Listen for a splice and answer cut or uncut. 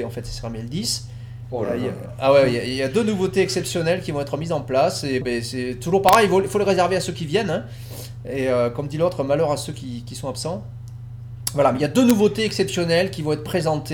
cut